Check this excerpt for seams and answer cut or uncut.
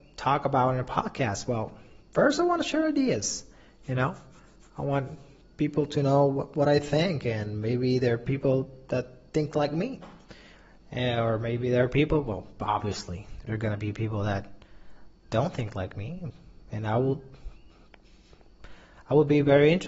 cut